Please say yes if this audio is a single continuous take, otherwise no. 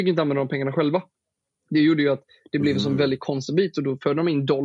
yes